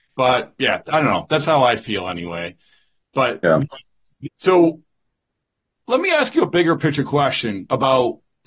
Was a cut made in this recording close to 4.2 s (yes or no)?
yes